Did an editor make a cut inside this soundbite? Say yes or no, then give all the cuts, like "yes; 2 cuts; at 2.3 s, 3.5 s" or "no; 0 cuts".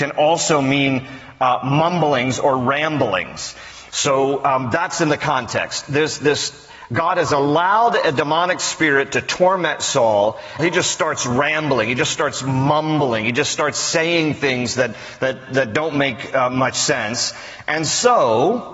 yes; 1 cut; at 10.6 s